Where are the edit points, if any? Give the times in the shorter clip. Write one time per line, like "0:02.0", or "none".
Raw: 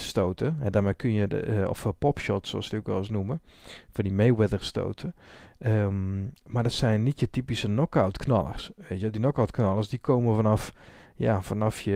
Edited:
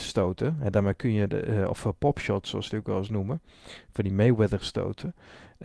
none